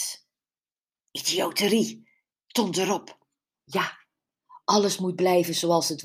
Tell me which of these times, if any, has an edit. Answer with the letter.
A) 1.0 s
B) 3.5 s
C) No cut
B